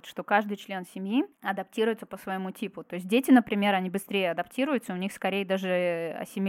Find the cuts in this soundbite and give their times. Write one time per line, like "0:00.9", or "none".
none